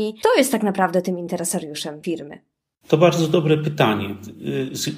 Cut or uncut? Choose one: uncut